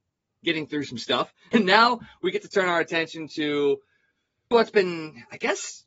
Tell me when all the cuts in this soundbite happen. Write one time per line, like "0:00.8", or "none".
0:01.5
0:04.5